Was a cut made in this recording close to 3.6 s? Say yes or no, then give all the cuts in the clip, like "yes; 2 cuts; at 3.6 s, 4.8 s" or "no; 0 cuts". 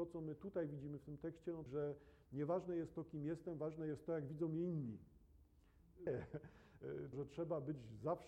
no; 3 cuts; at 1.7 s, 6.1 s, 7.1 s